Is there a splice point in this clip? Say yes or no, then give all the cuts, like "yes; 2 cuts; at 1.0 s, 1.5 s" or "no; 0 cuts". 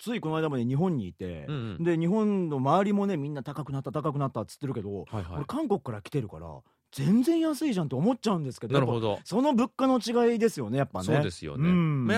no; 0 cuts